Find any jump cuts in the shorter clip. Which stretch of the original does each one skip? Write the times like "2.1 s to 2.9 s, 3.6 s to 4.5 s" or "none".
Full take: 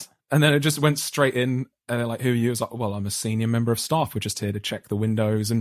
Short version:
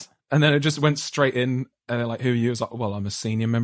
none